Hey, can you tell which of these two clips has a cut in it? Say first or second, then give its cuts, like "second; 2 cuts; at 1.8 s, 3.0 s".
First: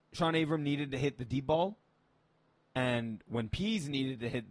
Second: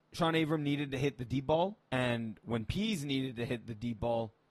second; 1 cut; at 1.8 s